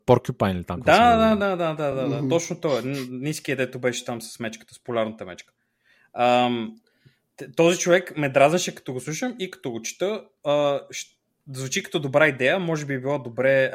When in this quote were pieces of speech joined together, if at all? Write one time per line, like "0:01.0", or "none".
none